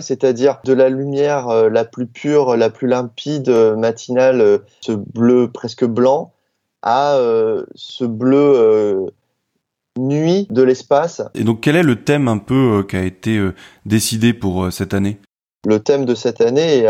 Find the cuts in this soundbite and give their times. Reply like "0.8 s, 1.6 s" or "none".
11.3 s